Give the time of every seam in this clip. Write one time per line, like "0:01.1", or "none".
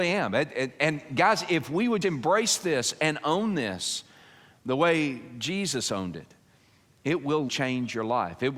0:02.0
0:07.5